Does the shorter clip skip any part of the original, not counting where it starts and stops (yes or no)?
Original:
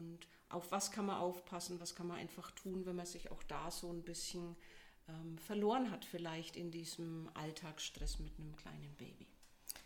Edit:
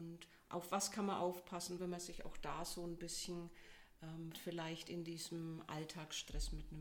yes